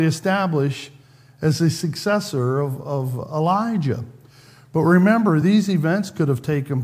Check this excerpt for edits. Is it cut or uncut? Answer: uncut